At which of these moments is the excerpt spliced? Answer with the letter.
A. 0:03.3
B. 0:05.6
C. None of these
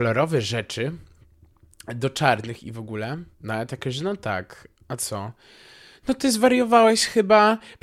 A